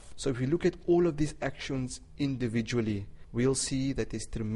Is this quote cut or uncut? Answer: uncut